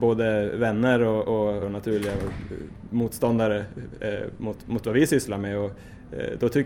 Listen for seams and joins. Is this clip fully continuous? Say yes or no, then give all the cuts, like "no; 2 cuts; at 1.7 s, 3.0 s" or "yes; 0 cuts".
no; 1 cut; at 1.6 s